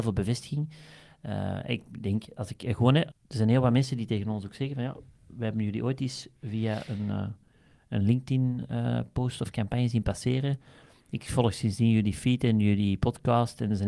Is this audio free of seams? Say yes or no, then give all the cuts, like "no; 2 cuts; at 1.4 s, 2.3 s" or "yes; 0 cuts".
no; 1 cut; at 3.1 s